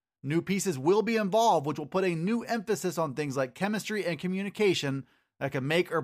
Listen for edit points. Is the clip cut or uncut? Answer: uncut